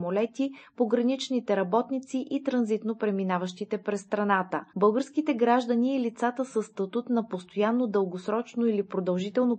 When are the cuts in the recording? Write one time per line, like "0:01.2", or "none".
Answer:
0:04.7